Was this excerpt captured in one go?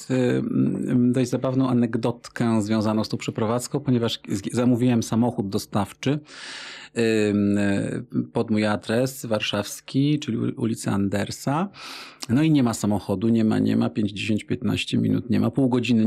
yes; 0 cuts

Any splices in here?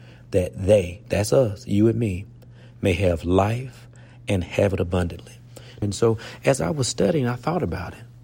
yes; 1 cut; at 5.8 s

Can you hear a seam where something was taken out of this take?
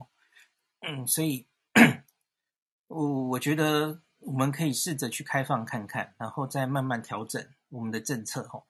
no; 0 cuts

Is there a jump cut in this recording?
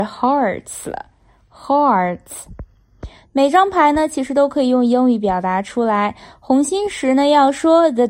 no; 0 cuts

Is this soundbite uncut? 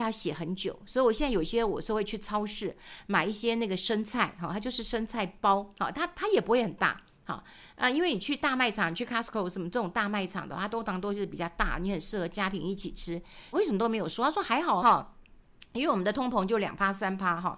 no; 2 cuts; at 13.5 s, 14.8 s

